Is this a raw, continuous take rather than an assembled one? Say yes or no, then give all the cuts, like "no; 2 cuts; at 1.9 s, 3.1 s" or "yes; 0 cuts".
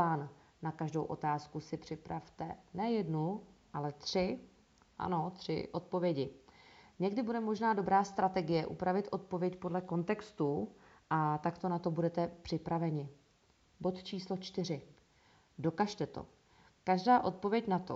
yes; 0 cuts